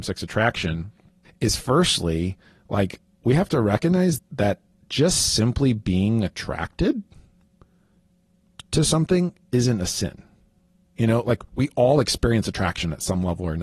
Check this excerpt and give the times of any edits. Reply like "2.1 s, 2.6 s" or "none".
1.2 s, 4.2 s